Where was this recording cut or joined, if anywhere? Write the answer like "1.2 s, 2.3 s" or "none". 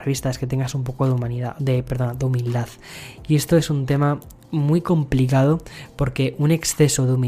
none